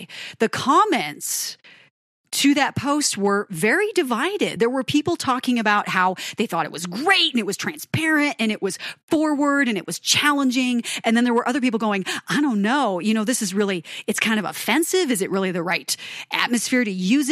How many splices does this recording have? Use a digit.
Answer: 0